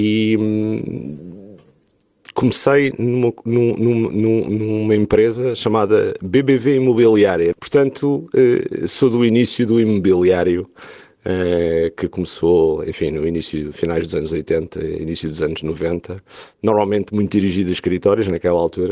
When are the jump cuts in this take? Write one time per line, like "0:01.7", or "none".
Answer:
0:07.5